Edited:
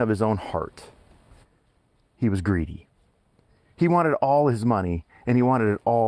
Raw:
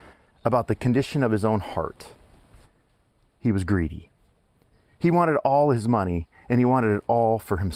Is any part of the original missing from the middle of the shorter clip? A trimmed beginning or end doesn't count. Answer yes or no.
no